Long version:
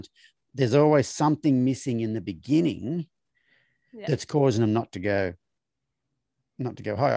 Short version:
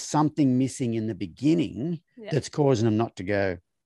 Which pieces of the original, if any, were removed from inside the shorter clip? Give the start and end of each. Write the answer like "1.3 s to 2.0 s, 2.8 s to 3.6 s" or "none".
3.1 s to 3.8 s